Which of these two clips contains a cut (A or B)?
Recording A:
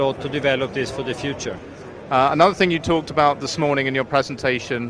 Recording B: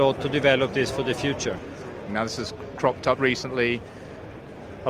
B